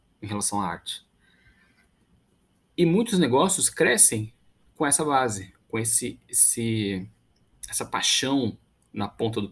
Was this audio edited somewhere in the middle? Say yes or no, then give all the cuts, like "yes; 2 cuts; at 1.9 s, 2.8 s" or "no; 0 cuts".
no; 0 cuts